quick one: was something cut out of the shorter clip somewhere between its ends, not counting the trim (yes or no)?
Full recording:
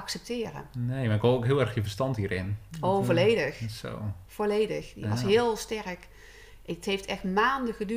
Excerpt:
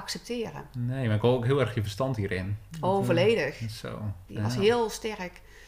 yes